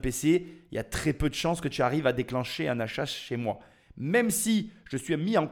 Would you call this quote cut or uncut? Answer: uncut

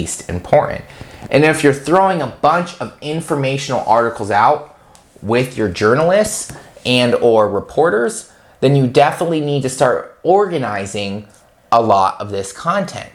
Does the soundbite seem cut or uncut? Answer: uncut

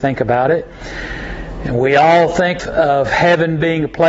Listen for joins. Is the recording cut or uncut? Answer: cut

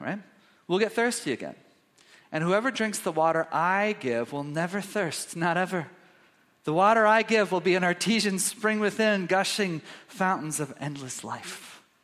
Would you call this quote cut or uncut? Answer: uncut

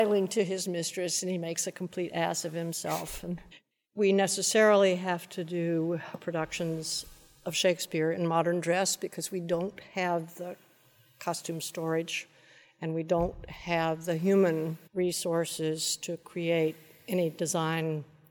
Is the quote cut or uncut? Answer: cut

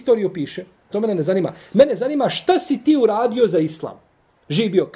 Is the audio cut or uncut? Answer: cut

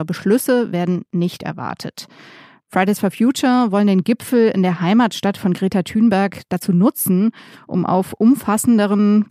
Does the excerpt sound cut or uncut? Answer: uncut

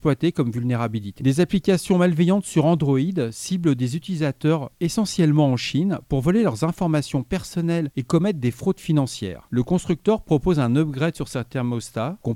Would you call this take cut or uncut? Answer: cut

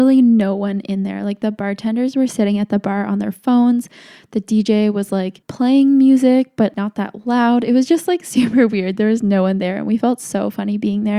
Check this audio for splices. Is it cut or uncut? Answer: uncut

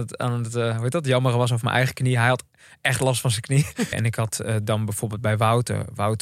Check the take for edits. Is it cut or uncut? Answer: cut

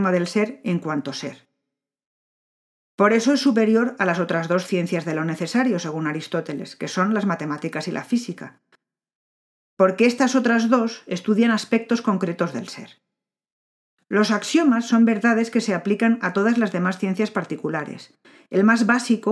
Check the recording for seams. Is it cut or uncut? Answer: uncut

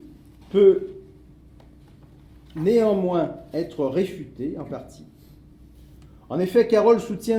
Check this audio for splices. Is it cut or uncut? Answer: uncut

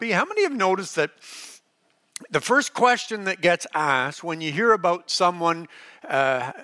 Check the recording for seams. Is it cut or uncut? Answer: uncut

